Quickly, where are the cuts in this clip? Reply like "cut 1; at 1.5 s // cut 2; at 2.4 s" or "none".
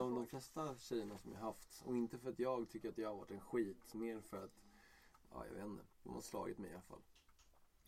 cut 1; at 5.9 s